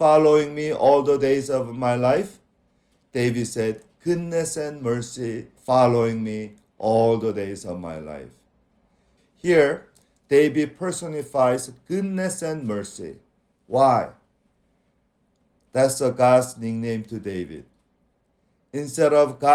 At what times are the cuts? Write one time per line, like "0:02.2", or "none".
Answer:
0:05.6
0:09.2